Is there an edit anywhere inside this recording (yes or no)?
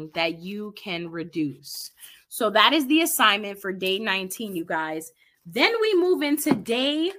no